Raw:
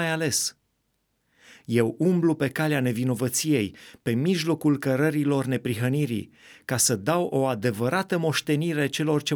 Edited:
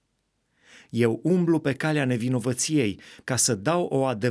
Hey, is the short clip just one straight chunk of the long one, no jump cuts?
no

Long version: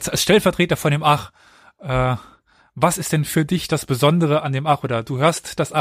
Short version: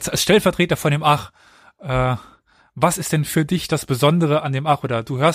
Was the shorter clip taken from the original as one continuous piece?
yes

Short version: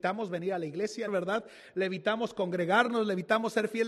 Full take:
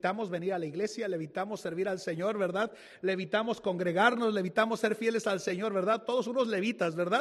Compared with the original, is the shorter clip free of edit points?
no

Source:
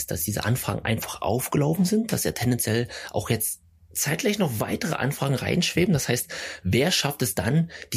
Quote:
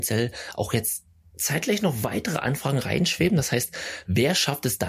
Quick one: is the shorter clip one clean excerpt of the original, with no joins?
yes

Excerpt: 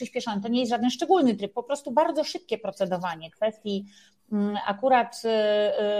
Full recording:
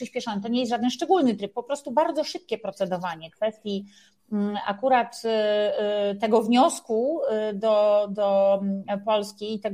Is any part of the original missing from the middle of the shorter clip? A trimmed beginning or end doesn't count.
no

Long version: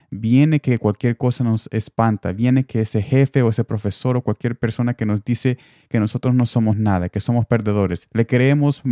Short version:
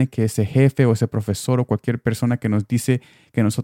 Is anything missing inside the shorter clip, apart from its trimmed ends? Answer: no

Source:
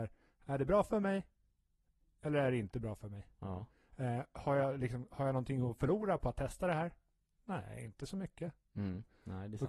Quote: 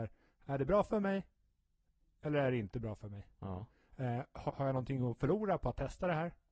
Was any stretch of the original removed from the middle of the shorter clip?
yes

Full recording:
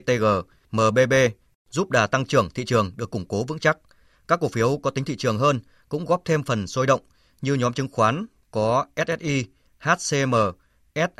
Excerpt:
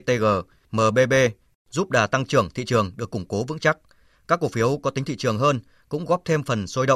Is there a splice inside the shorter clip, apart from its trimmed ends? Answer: no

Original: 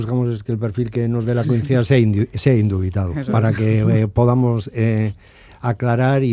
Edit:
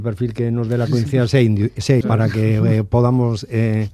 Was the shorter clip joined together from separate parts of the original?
yes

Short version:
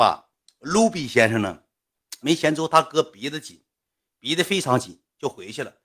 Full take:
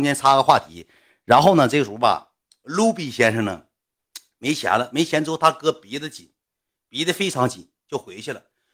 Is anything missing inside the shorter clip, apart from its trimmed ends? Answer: yes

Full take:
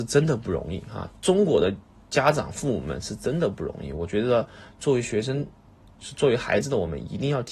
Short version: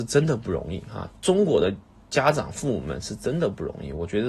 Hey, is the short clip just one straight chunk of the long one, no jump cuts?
yes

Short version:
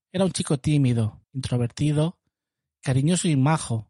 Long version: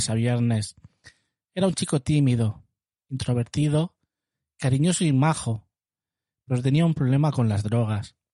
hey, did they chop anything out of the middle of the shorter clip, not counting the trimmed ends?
yes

